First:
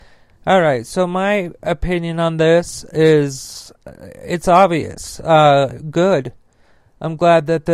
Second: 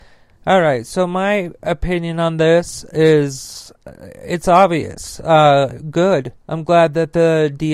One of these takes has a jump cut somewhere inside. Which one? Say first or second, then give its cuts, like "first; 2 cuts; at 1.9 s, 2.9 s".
second; 1 cut; at 6.4 s